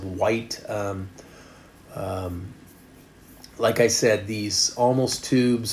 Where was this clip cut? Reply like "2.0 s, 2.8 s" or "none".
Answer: none